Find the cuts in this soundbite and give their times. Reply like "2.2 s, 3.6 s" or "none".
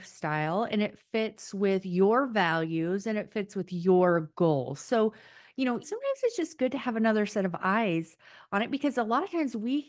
5.8 s